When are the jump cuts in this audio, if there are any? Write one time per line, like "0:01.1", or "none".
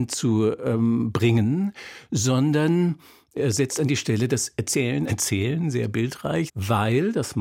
0:05.1
0:06.5

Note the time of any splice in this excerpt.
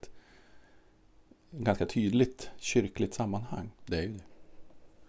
0:03.7

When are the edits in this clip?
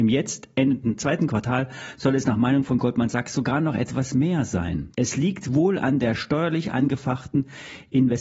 0:04.9

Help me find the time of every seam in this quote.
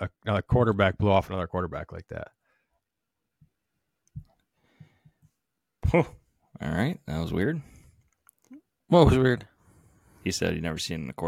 none

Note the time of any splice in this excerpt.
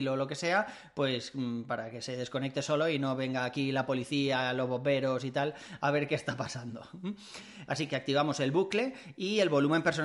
0:07.7

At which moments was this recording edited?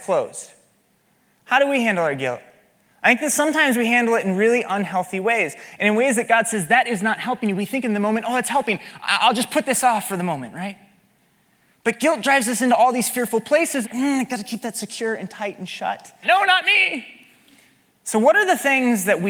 0:13.8
0:16.2

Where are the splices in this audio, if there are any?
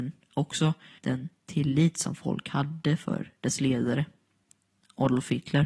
0:01.0

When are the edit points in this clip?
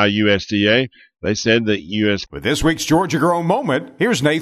0:02.3

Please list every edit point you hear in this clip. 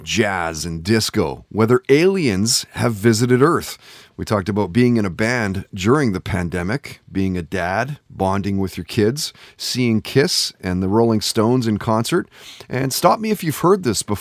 0:09.5

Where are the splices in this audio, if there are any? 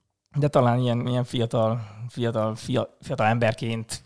0:01.1

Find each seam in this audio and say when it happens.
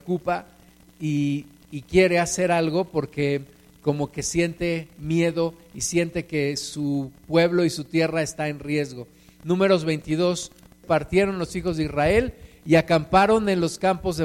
0:10.8

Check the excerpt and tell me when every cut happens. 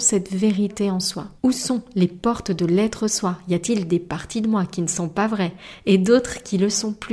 0:01.4

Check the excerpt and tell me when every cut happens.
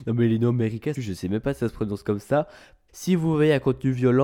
0:00.9
0:02.9

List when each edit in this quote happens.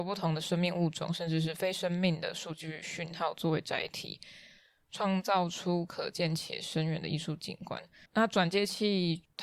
0:08.1

